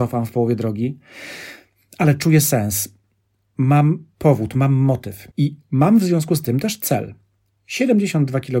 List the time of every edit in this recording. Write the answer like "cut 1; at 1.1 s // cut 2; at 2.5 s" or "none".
cut 1; at 5.3 s